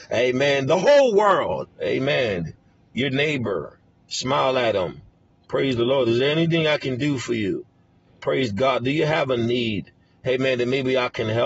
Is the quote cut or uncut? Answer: cut